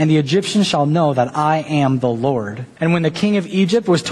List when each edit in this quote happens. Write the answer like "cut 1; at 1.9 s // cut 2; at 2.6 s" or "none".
cut 1; at 2.8 s